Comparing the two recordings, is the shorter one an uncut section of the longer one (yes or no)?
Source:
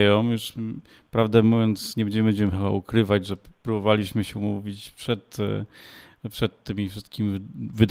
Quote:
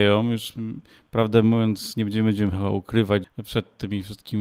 no